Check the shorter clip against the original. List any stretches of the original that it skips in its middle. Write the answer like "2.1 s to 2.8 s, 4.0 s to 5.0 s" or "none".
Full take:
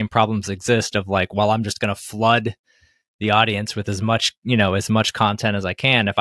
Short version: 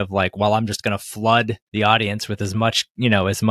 2.6 s to 3.1 s